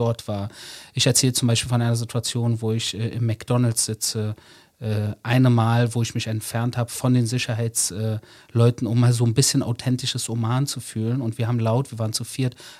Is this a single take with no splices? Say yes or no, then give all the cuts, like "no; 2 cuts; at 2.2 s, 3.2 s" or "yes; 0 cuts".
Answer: yes; 0 cuts